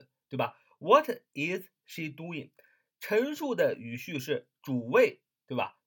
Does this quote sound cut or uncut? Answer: uncut